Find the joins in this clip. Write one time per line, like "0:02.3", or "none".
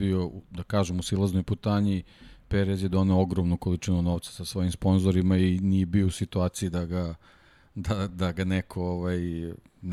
none

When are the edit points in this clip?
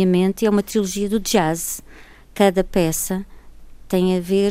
none

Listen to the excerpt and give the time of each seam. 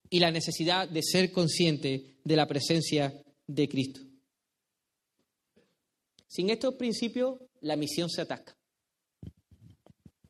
none

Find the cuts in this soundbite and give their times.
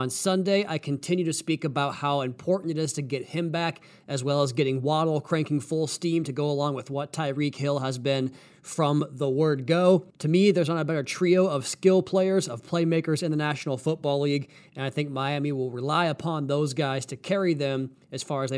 0:10.1

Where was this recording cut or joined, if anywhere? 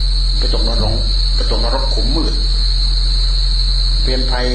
none

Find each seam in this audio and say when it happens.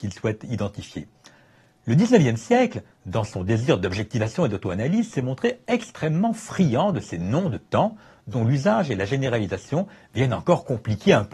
none

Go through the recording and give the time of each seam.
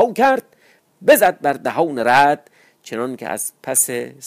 none

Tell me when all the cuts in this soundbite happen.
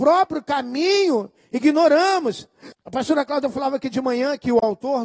0:02.7

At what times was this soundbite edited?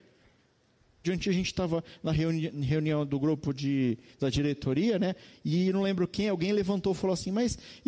0:01.0

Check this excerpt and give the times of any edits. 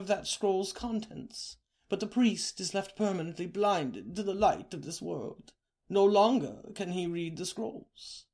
none

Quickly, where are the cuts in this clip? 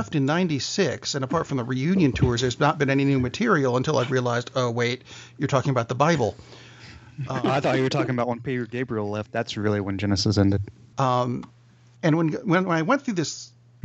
0:10.9

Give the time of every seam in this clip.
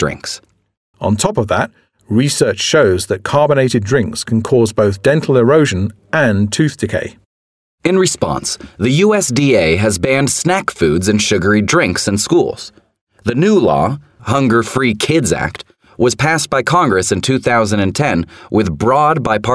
0:00.9
0:14.2

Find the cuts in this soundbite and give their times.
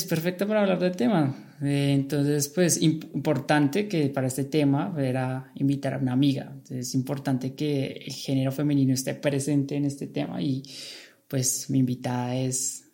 none

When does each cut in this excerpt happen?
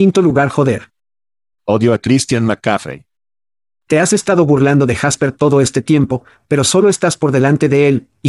0:01.5

